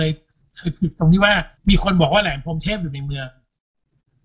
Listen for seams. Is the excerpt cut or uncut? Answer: cut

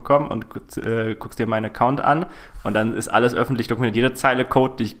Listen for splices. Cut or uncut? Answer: uncut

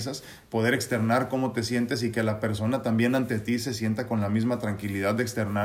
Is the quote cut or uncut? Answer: uncut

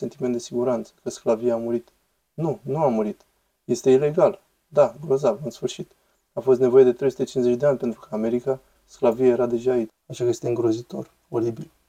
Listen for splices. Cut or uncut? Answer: cut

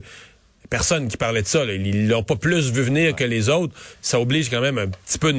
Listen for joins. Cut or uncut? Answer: uncut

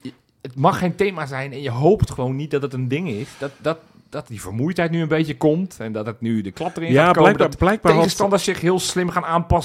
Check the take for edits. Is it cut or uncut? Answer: uncut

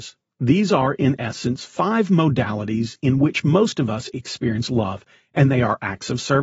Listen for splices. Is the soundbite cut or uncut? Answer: uncut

